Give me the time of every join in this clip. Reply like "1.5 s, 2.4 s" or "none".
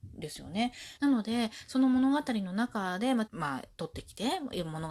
1.0 s, 3.3 s